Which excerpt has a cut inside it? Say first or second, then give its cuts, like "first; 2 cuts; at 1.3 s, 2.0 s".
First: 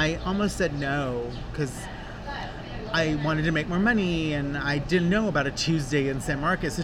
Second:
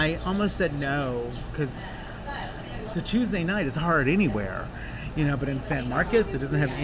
second; 1 cut; at 2.9 s